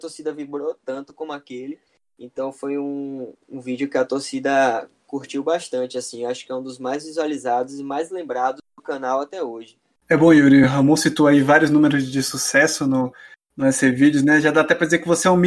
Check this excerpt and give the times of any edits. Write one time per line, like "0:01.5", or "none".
none